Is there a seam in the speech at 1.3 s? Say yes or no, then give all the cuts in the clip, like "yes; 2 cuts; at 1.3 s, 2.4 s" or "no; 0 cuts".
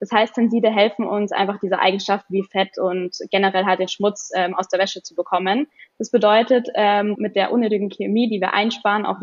no; 2 cuts; at 5.8 s, 7.1 s